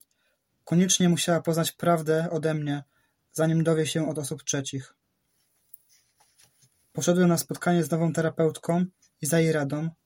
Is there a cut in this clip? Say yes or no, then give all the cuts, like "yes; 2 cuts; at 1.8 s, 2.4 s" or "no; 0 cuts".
no; 0 cuts